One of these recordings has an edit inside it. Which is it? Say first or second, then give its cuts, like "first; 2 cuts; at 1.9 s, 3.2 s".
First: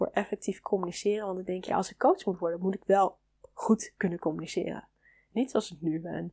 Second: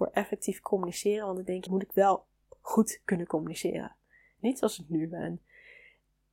second; 1 cut; at 1.7 s